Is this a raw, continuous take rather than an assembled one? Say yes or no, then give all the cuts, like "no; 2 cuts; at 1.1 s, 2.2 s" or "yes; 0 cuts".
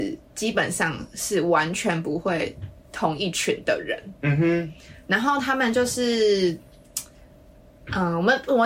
yes; 0 cuts